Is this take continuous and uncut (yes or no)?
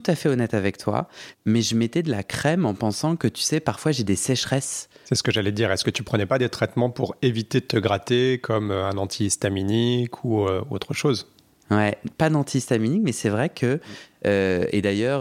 no